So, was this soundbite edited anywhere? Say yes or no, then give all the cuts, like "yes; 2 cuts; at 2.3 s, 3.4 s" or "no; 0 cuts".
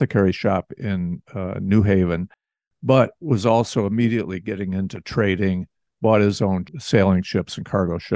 no; 0 cuts